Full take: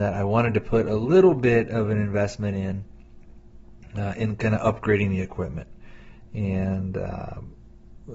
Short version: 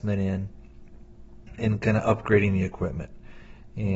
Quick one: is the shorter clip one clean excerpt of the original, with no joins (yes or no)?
no